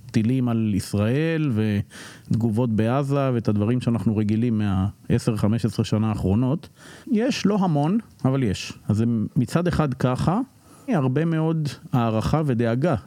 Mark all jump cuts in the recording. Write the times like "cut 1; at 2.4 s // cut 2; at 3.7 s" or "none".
cut 1; at 7.0 s // cut 2; at 8.8 s // cut 3; at 10.9 s